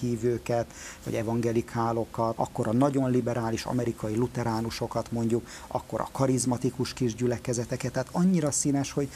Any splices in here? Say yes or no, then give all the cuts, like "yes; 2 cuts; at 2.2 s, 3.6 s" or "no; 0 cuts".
yes; 1 cut; at 2.4 s